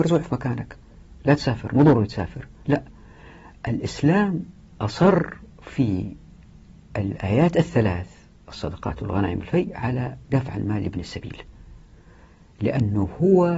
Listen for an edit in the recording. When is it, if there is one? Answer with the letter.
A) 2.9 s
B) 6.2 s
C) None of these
C